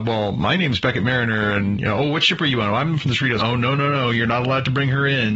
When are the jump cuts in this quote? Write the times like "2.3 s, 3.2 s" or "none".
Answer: 3.4 s